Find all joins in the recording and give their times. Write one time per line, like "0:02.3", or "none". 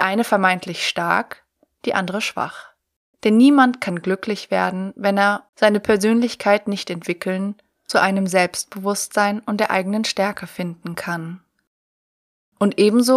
0:03.1
0:05.5

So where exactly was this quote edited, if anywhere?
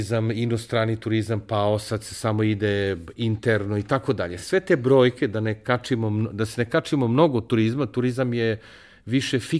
none

